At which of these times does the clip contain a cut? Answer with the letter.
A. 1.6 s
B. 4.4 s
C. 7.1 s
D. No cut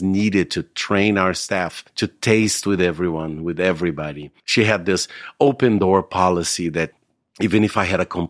B